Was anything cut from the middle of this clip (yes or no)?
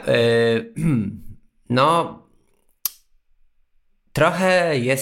no